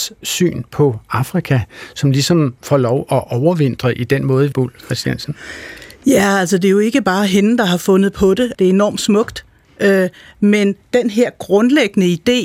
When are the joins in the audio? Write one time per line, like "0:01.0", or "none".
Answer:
0:04.5
0:08.5